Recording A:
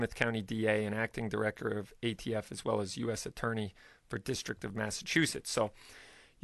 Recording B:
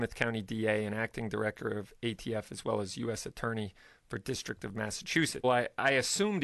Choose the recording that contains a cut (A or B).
B